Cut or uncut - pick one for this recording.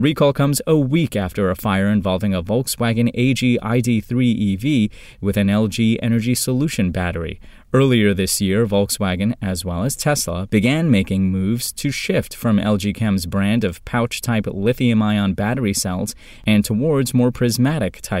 uncut